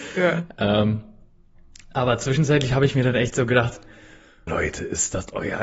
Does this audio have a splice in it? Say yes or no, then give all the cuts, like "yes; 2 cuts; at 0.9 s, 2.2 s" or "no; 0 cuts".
yes; 1 cut; at 4.5 s